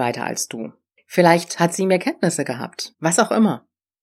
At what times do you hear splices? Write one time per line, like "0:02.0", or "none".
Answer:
0:02.9